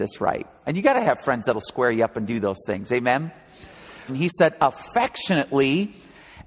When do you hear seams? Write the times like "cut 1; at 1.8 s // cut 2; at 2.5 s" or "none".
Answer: cut 1; at 4.1 s